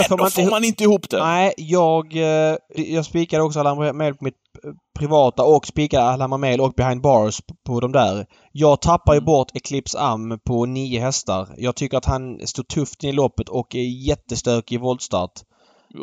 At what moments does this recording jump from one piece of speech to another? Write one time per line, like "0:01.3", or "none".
0:02.7